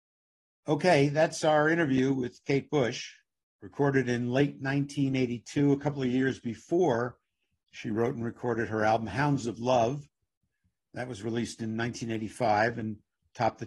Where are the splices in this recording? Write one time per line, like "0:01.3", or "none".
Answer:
none